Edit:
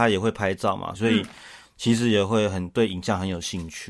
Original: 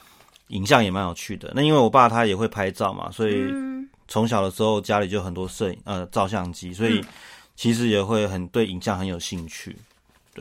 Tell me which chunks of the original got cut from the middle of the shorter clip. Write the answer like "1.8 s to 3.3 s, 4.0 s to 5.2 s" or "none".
3.1 s to 6.7 s